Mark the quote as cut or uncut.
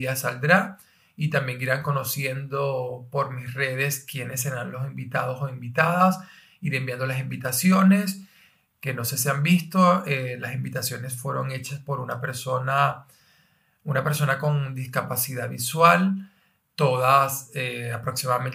cut